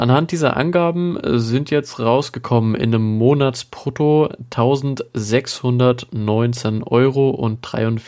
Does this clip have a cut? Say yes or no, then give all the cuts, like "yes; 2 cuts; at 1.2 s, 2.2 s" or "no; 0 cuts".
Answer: no; 0 cuts